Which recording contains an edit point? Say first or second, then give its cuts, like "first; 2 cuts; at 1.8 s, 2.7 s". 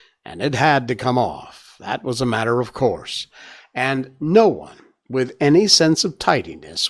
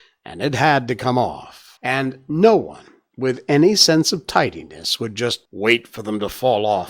second; 2 cuts; at 1.8 s, 5.5 s